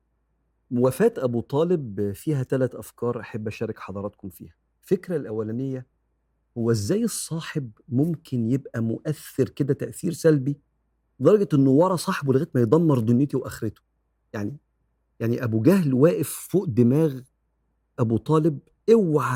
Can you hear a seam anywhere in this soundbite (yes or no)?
no